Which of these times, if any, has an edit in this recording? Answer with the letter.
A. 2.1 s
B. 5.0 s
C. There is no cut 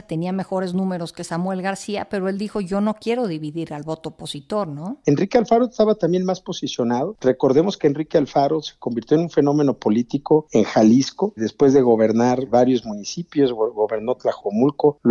B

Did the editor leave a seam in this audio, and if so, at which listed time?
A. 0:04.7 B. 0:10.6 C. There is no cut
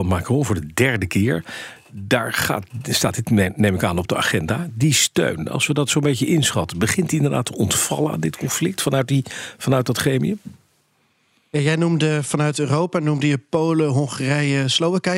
C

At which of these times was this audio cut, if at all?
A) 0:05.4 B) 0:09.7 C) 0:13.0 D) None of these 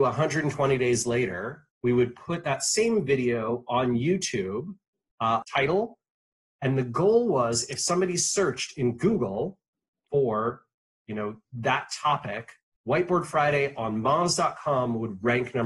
A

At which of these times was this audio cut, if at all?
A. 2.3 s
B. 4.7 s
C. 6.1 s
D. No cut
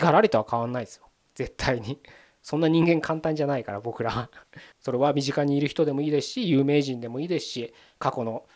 B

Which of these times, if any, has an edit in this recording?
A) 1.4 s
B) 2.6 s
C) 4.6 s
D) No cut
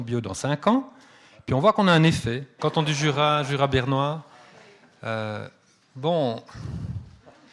B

